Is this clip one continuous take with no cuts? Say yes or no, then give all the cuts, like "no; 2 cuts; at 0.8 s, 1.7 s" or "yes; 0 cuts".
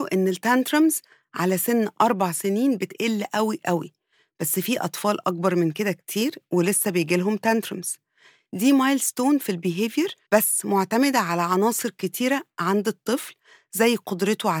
no; 1 cut; at 10.2 s